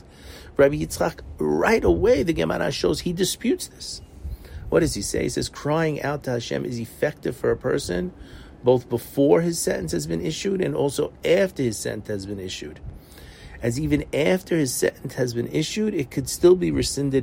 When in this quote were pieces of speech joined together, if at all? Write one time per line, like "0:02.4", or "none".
none

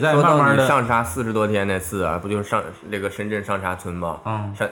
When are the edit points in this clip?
none

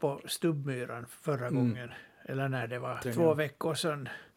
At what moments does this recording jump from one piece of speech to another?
0:03.0

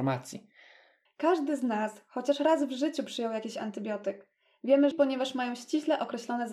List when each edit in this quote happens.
0:01.1
0:04.9

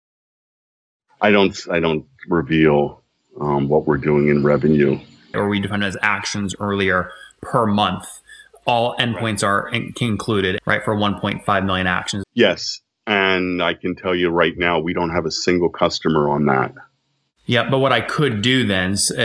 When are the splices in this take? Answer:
0:05.3
0:10.6
0:12.2

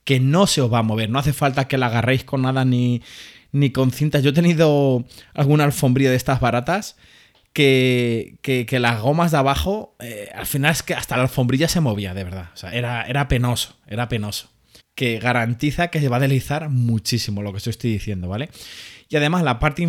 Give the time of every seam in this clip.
0:12.7
0:14.8

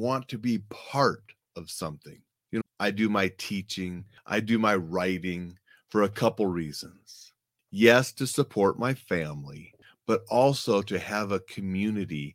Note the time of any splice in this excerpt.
0:02.6

